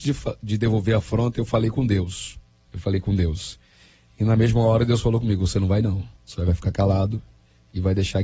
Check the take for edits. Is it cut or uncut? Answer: cut